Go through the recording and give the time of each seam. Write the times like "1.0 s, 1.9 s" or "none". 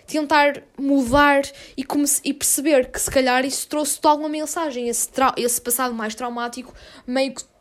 none